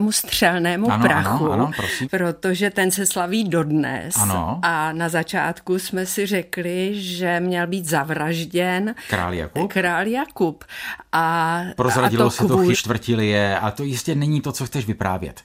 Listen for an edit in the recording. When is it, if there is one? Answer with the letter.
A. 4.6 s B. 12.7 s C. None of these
B